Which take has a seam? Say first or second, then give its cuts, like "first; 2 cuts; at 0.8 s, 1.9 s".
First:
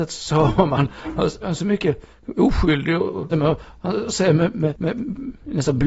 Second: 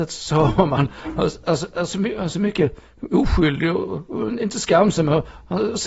first; 2 cuts; at 1.4 s, 3.3 s